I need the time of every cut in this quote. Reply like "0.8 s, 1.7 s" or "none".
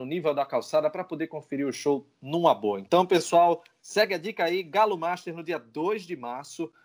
none

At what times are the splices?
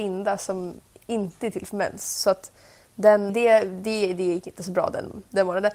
3.3 s

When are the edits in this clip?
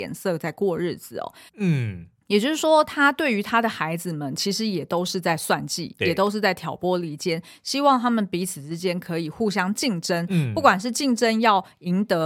1.5 s

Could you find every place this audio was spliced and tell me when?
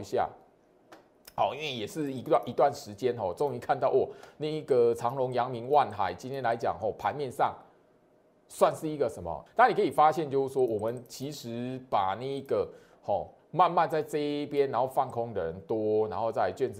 9.5 s, 13.4 s

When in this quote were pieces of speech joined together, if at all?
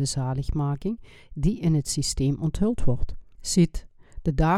3.4 s

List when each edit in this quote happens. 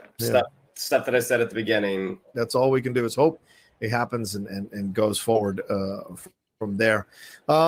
2.3 s

